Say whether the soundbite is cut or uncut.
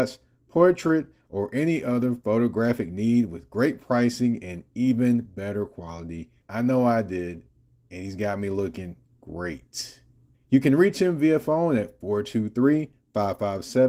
cut